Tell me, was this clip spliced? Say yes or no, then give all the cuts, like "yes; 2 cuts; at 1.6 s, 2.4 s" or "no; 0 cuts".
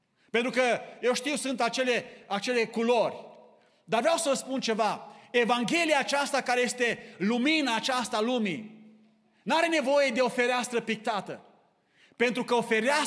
no; 0 cuts